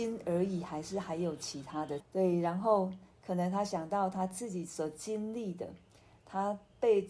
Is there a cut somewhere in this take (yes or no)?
yes